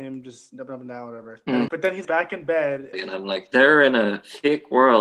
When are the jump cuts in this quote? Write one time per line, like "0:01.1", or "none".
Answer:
0:01.7
0:02.9